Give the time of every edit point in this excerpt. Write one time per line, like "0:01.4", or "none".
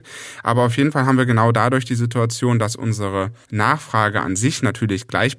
0:03.4